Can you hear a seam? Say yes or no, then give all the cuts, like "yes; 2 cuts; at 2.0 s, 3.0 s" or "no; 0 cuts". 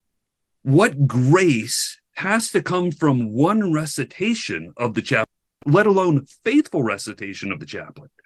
no; 0 cuts